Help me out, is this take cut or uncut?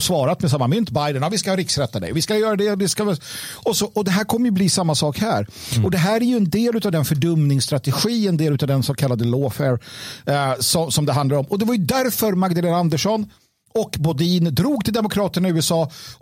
uncut